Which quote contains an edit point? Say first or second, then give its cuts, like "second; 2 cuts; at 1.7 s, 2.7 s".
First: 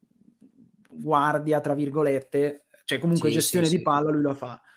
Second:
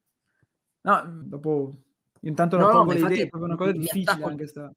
second; 2 cuts; at 1.2 s, 3.3 s